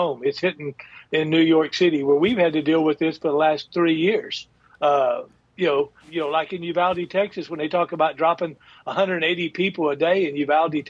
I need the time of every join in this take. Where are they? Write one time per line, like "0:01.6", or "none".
0:06.0